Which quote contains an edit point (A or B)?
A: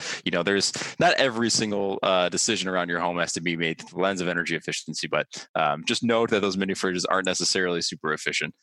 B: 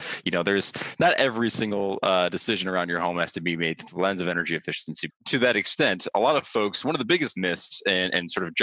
B